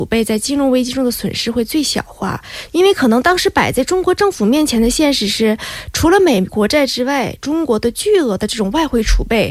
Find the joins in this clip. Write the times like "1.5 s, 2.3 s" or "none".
2.7 s, 6.5 s